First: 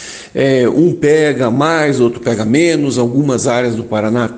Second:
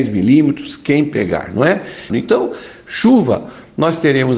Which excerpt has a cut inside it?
second; 1 cut; at 2.1 s

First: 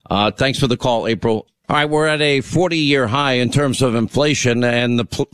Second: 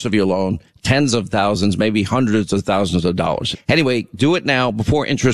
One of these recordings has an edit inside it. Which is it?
second; 1 cut; at 3.5 s

